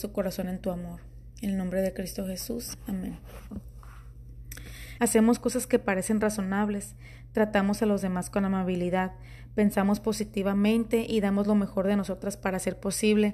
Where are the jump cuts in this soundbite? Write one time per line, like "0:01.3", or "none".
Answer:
0:05.0